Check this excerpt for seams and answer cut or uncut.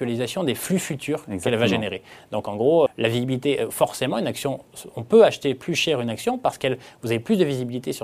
cut